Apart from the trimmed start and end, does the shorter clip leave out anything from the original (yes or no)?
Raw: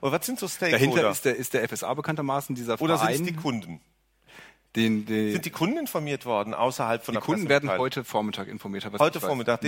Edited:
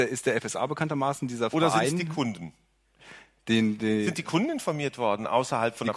no